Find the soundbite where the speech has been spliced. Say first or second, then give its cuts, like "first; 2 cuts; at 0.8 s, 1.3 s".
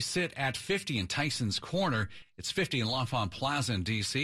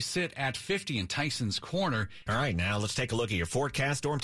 second; 1 cut; at 2.3 s